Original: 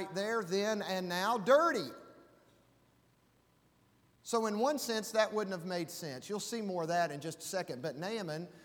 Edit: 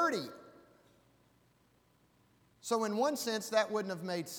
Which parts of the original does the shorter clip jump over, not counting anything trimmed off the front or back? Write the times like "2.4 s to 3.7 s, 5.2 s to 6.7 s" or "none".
none